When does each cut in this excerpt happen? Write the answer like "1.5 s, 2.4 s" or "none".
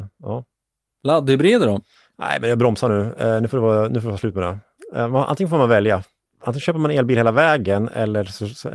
none